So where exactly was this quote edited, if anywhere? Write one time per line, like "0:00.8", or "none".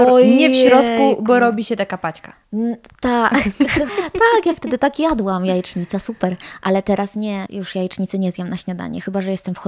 0:03.9
0:07.5